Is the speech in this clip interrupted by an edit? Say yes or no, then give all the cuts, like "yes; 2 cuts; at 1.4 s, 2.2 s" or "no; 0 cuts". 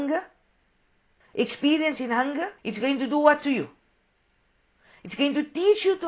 yes; 2 cuts; at 1.2 s, 2.6 s